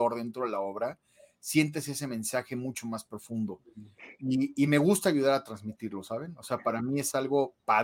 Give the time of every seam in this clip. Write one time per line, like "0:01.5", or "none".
none